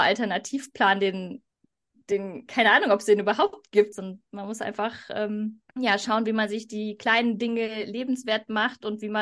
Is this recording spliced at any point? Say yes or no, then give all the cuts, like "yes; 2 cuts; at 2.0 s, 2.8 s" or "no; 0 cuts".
yes; 2 cuts; at 3.9 s, 5.7 s